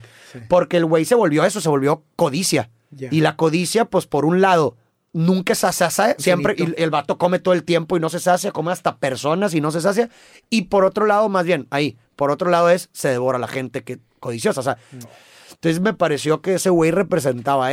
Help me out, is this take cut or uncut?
cut